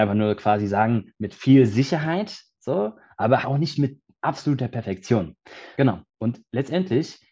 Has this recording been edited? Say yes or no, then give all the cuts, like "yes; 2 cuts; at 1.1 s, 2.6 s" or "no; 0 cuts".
yes; 2 cuts; at 3.4 s, 5.7 s